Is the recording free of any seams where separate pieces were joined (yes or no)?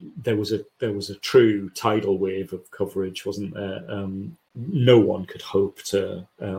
yes